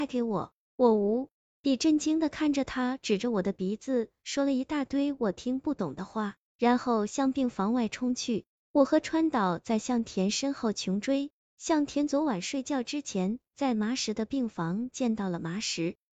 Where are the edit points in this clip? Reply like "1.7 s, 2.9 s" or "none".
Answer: 8.6 s